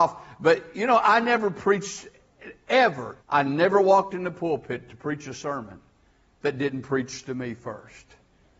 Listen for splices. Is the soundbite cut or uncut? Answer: cut